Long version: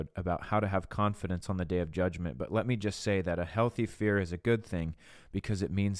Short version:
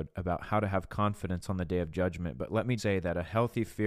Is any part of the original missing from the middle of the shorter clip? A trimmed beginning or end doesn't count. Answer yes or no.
yes